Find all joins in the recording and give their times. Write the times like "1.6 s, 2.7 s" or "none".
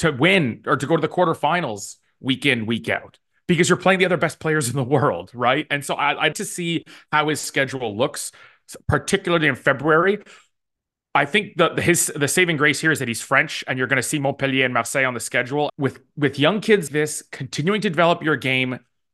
6.3 s, 15.7 s, 16.9 s